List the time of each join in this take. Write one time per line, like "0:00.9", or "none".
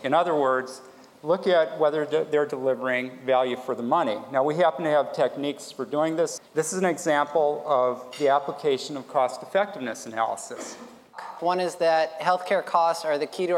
0:06.4
0:11.4